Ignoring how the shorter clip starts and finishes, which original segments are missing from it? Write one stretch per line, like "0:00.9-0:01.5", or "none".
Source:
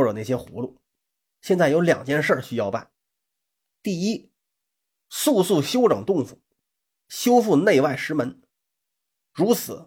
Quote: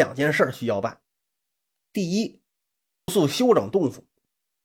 0:05.0-0:05.4